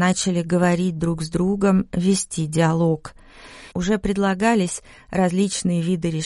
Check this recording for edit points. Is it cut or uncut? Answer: cut